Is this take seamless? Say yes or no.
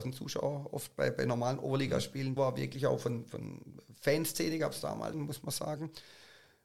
no